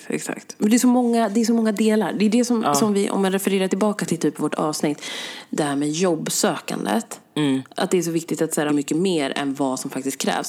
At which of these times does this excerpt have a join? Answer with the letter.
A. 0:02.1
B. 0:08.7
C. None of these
B